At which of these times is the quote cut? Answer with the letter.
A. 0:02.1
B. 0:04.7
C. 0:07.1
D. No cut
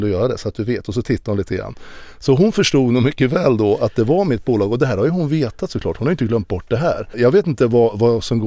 C